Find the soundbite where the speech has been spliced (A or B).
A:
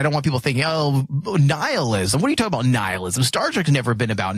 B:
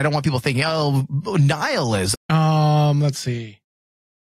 B